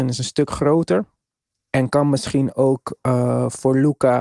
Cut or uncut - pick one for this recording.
uncut